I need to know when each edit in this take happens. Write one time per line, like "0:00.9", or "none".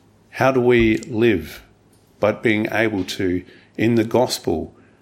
none